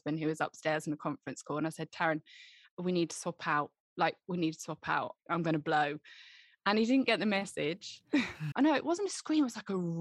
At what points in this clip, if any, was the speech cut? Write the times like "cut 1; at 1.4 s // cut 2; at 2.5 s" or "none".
cut 1; at 8.5 s